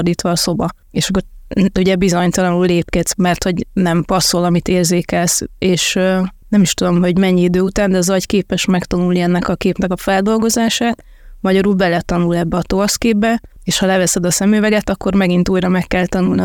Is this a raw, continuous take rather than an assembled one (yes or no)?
yes